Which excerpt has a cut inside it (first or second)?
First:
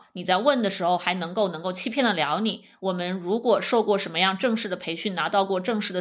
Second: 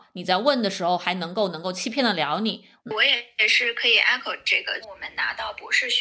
second